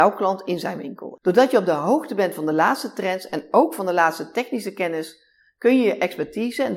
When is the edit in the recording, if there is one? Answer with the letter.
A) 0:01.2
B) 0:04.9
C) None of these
A